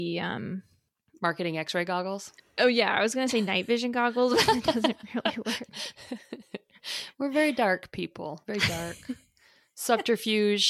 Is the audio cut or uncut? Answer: uncut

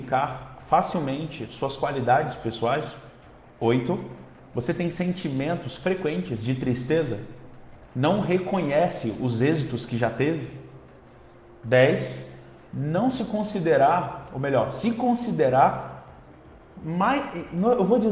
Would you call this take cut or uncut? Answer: cut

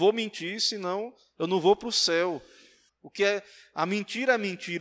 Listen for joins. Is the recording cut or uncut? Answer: cut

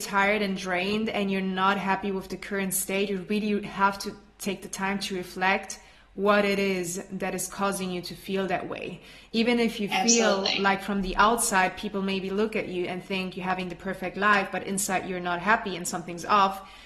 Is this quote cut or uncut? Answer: uncut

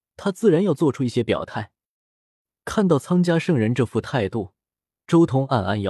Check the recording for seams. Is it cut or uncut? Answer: uncut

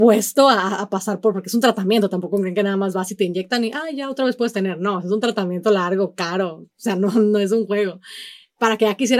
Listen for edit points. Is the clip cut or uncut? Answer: uncut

